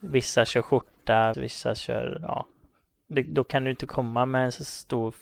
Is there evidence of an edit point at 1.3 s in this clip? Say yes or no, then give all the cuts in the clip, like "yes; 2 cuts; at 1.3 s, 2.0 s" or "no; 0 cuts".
yes; 1 cut; at 1.3 s